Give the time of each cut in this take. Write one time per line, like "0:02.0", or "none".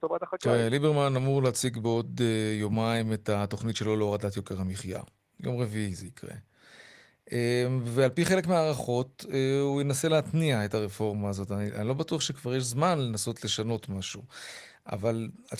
none